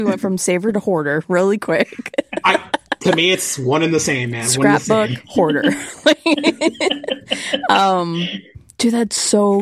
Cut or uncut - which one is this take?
uncut